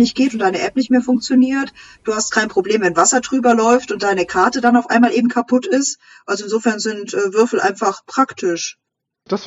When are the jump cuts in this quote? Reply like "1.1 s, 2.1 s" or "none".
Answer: none